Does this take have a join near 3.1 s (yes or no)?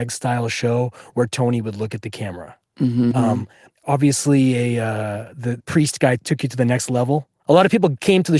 yes